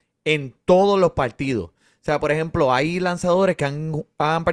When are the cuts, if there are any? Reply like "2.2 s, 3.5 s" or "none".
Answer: none